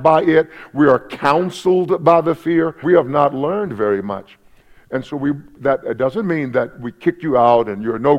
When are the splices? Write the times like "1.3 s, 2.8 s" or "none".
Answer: 2.8 s